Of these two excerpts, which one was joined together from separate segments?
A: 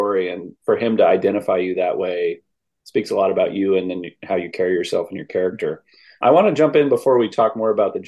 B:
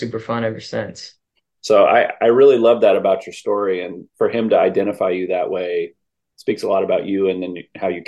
B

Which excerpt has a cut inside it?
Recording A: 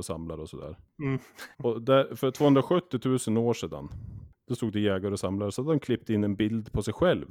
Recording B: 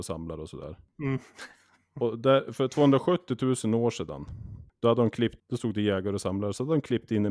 A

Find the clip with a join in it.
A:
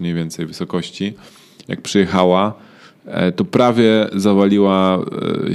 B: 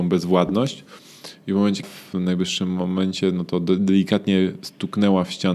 B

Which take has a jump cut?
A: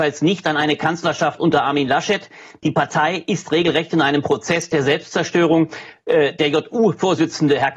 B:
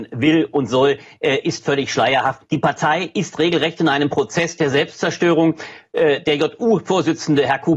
B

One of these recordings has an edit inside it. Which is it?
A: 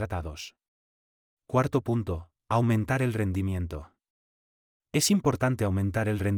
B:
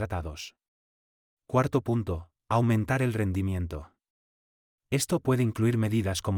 B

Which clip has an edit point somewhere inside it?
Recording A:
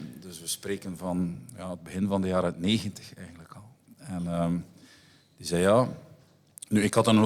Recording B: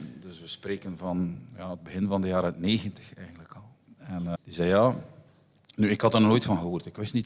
B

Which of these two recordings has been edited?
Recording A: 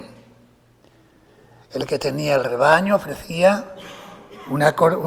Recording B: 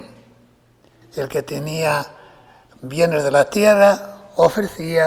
B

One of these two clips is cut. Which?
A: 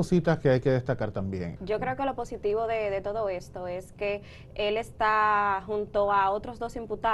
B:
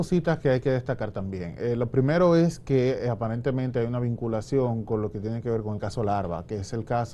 A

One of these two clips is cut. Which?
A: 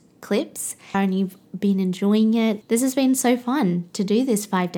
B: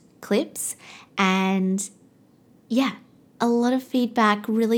A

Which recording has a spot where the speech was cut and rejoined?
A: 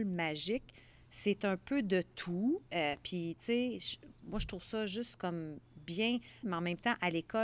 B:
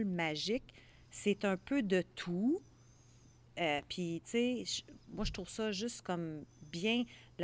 A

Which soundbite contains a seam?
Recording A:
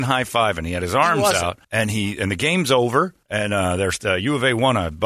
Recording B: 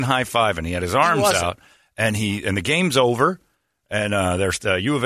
A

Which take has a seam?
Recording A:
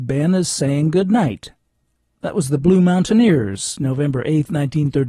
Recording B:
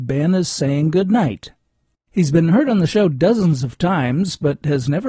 B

